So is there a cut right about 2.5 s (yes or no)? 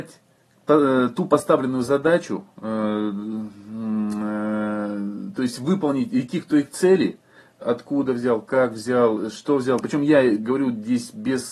no